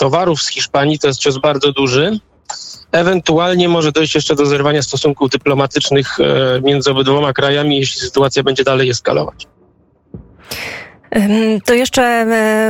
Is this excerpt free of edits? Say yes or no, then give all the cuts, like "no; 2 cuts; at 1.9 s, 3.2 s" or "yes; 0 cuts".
yes; 0 cuts